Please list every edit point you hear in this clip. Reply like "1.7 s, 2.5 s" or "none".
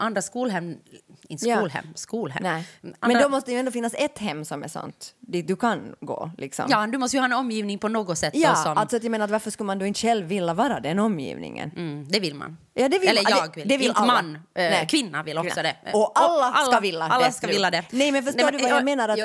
none